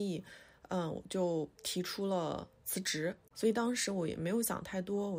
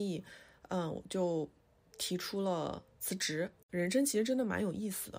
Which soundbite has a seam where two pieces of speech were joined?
first; 2 cuts; at 1.5 s, 3.3 s

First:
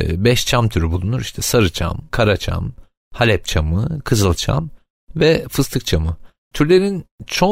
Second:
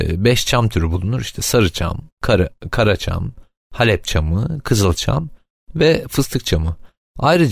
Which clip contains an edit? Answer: first; 2 cuts; at 2.1 s, 6.5 s

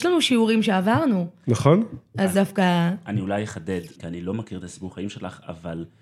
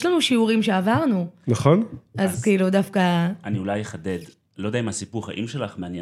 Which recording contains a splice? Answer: first; 2 cuts; at 2.3 s, 4.0 s

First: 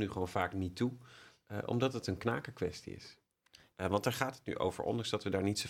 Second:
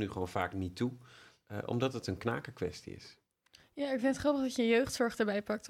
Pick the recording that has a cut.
first; 1 cut; at 3.7 s

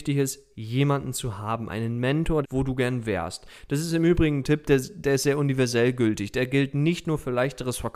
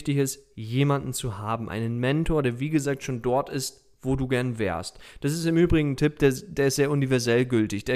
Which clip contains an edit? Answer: first; 1 cut; at 2.4 s

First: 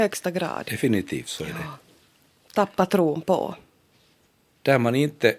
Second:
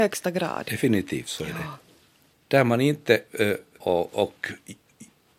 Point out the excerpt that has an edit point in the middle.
second; 2 cuts; at 2.3 s, 3.8 s

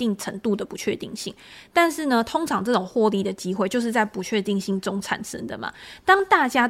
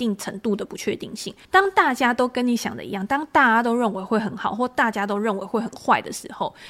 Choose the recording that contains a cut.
second; 1 cut; at 1.4 s

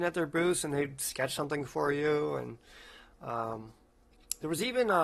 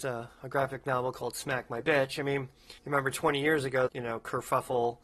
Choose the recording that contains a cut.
second; 2 cuts; at 2.8 s, 3.9 s

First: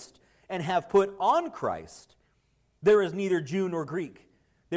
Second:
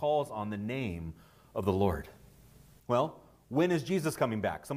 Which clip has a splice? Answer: second; 1 cut; at 2.8 s

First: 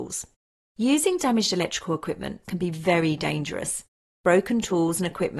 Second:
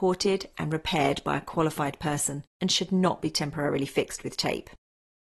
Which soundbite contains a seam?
first; 1 cut; at 2.4 s

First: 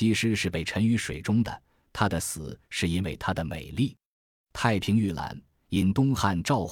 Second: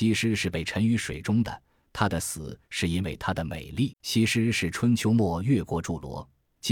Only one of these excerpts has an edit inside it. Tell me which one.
second; 1 cut; at 3.9 s

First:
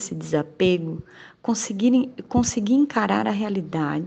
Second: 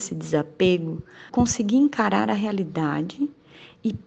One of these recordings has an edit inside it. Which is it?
second; 1 cut; at 1.3 s

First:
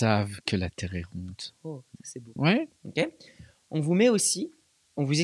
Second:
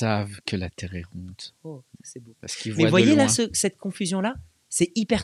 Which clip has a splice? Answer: first; 1 cut; at 2.4 s

